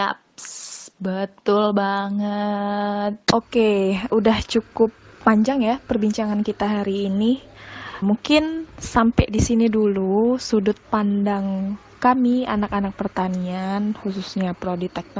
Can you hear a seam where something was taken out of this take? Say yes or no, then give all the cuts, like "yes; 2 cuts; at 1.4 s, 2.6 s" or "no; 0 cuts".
yes; 2 cuts; at 4.1 s, 8.0 s